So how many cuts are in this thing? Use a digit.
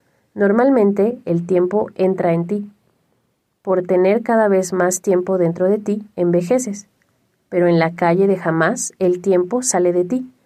0